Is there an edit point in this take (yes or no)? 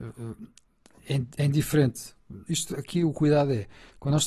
yes